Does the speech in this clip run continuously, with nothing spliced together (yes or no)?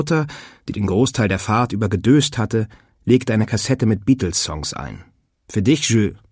no